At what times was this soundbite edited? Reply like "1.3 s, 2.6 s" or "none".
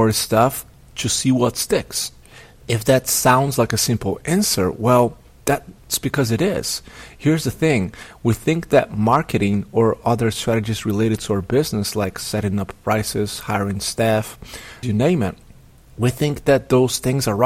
14.8 s